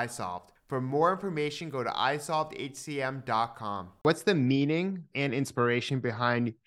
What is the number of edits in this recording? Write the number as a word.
one